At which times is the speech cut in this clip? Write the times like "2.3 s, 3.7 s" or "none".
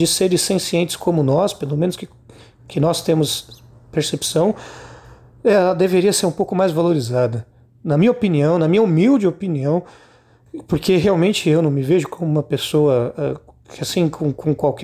none